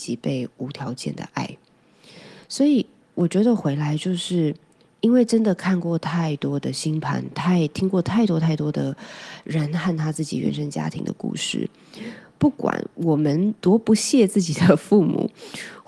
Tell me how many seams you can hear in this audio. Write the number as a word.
zero